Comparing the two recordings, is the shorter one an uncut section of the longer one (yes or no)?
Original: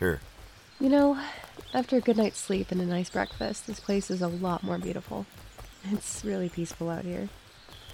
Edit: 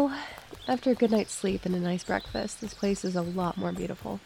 yes